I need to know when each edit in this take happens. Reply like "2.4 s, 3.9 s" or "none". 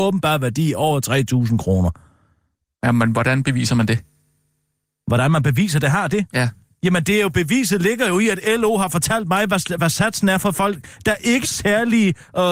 9.8 s, 11.4 s